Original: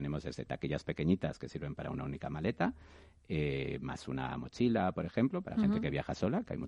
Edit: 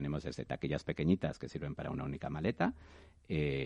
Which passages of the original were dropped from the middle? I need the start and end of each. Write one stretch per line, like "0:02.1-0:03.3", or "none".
none